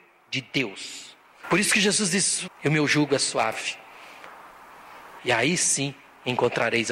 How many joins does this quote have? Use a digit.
3